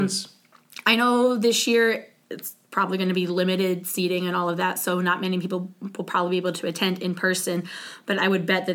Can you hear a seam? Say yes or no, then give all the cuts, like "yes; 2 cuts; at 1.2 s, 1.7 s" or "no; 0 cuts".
no; 0 cuts